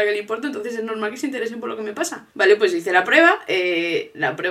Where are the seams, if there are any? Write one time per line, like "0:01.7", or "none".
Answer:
0:02.3